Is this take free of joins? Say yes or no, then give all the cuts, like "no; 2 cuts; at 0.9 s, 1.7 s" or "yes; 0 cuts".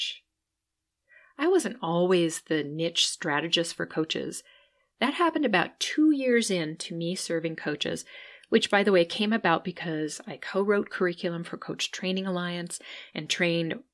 yes; 0 cuts